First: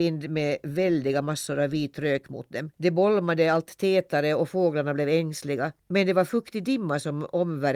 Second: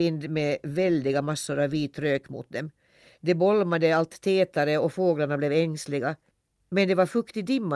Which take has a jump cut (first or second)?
first